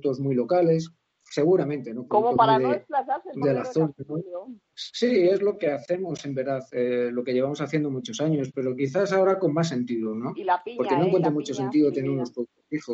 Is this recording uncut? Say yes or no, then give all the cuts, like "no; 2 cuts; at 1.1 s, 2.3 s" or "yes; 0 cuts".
no; 2 cuts; at 2.1 s, 3.4 s